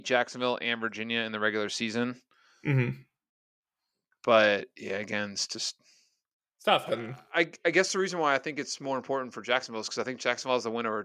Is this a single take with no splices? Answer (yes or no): no